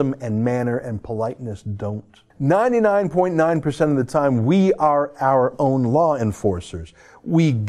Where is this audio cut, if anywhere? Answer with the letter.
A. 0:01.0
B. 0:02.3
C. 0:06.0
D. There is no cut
B